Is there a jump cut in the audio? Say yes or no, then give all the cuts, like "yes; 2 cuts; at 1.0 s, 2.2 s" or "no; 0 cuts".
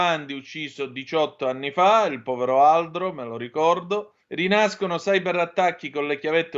yes; 1 cut; at 4.2 s